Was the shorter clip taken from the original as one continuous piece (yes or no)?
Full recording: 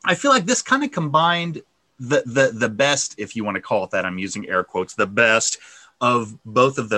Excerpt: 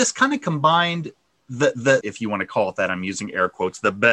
no